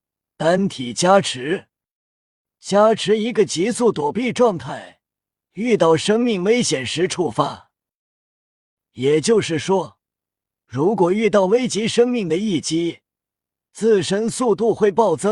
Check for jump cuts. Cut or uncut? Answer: uncut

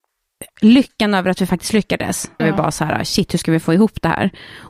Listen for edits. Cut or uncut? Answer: cut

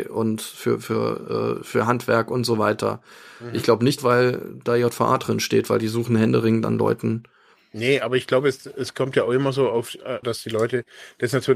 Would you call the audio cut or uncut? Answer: cut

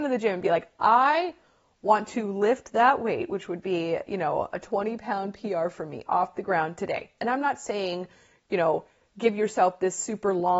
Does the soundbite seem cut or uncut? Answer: cut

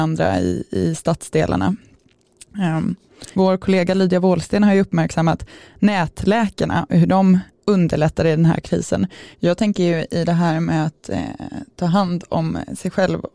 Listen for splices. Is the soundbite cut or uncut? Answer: cut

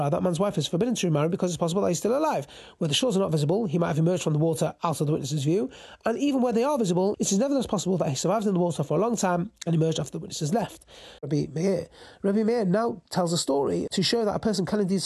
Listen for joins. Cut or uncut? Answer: cut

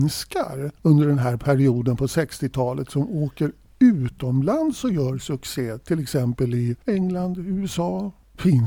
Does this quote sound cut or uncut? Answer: cut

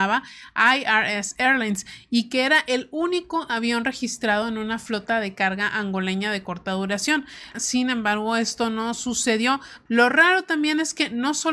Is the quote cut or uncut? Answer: cut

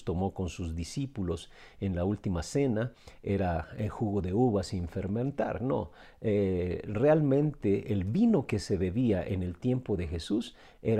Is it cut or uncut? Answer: uncut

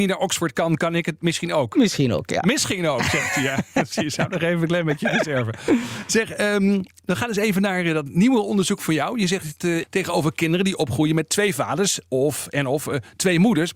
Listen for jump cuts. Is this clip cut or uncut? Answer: cut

